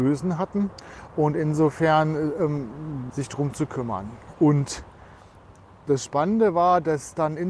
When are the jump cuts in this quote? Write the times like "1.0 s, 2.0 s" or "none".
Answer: 3.1 s